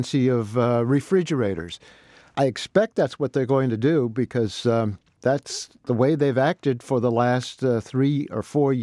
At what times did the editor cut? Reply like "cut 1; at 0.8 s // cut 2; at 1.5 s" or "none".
none